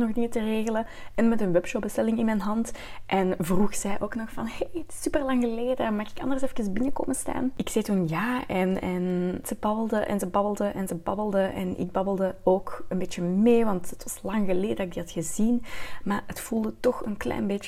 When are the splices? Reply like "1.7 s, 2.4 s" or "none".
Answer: none